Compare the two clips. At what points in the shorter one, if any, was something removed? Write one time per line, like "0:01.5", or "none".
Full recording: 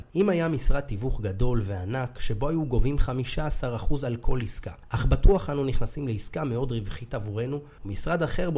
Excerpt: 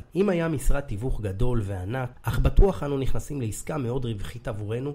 0:02.1